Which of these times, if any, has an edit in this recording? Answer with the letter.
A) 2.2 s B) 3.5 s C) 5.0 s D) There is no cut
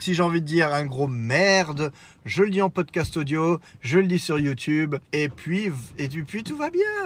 C